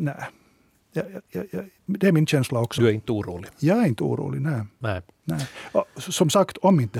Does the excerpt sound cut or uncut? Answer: uncut